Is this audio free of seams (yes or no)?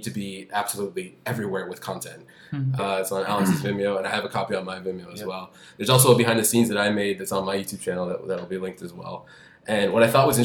no